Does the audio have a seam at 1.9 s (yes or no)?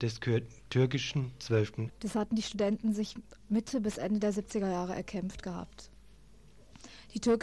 yes